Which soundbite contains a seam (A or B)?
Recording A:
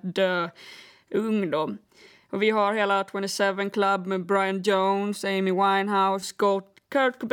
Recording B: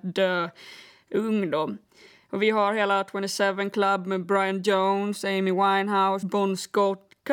A